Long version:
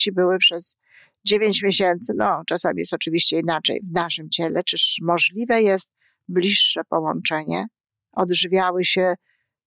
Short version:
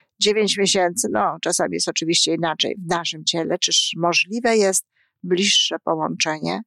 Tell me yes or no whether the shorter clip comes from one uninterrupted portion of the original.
yes